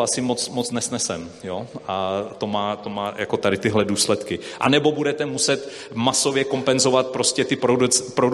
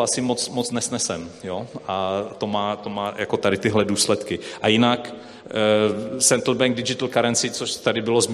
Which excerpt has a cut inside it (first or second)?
first